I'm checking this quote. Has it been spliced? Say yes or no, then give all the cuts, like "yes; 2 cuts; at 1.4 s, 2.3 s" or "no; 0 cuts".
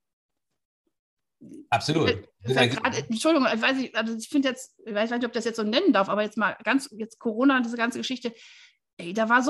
no; 0 cuts